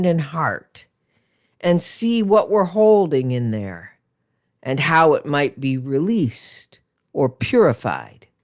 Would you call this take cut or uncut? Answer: uncut